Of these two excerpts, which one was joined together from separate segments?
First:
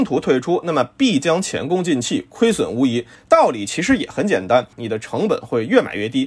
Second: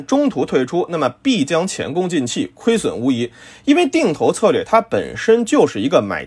first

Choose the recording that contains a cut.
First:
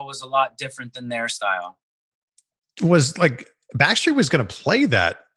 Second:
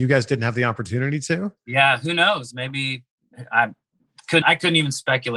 second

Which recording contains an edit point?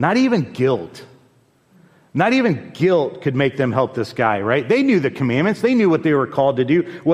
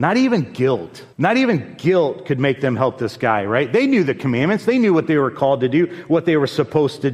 second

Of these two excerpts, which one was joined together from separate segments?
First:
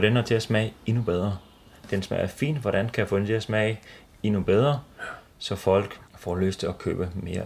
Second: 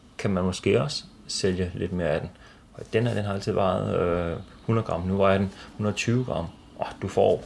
first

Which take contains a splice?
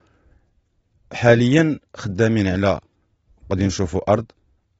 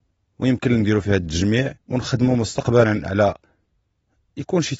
second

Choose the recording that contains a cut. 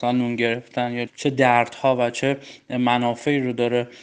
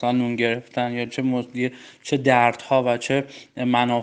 first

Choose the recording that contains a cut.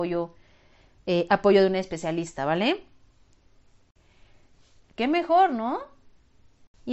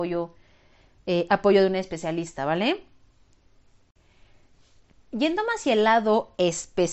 first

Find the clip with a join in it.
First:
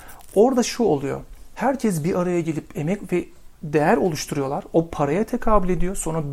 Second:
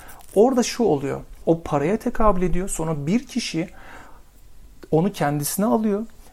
second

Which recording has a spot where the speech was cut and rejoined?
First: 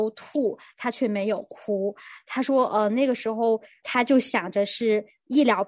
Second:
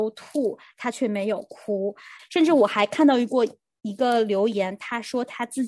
second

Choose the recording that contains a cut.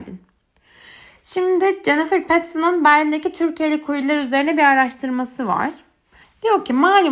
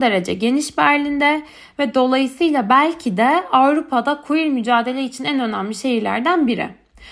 first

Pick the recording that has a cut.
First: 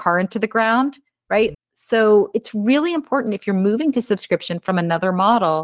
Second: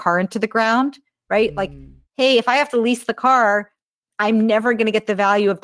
first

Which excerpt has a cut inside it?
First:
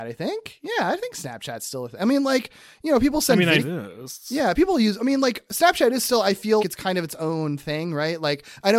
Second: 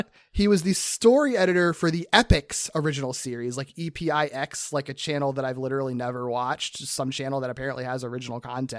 first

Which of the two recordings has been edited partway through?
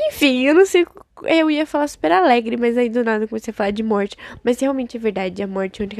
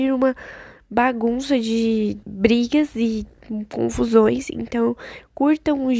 second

